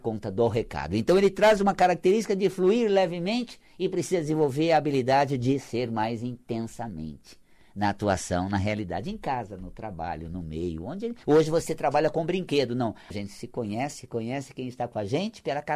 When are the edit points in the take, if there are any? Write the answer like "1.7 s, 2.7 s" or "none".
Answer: 11.2 s, 13.1 s